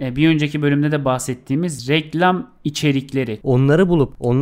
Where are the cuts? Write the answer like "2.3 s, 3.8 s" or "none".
3.4 s